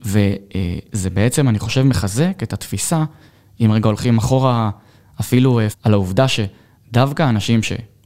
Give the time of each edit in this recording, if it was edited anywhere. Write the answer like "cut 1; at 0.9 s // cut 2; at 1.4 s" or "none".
cut 1; at 5.7 s

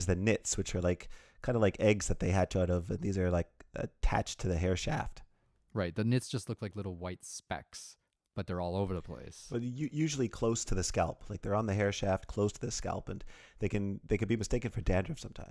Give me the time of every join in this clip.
none

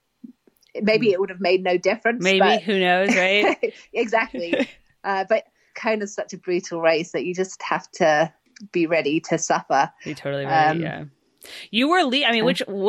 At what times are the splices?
cut 1; at 5.7 s

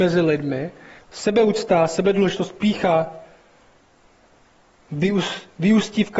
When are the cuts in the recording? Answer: cut 1; at 1.0 s

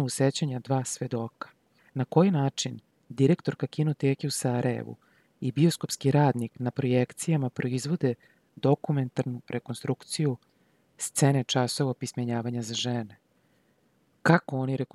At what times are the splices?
none

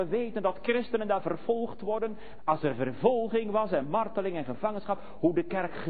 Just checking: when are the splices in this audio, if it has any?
cut 1; at 2.4 s

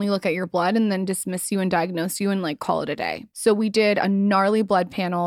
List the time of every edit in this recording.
cut 1; at 3.3 s

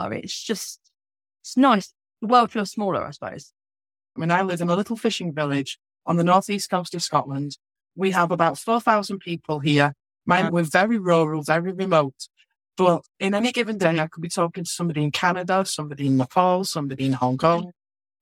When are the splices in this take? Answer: cut 1; at 4.2 s // cut 2; at 10.5 s

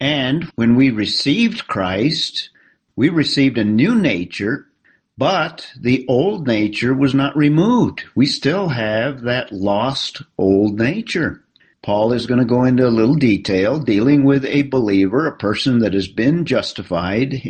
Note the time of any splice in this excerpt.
cut 1; at 11.7 s

